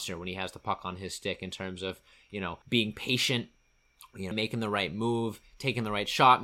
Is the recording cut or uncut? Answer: cut